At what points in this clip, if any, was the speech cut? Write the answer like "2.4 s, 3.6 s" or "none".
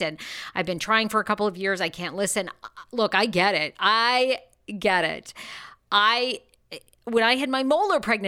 none